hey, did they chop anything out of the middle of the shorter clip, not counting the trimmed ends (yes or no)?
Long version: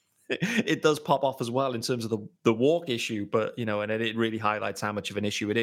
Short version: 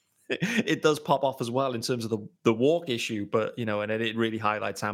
no